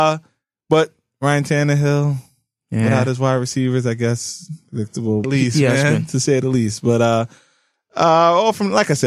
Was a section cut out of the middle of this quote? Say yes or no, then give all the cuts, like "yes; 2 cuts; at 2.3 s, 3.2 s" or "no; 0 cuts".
yes; 1 cut; at 5.2 s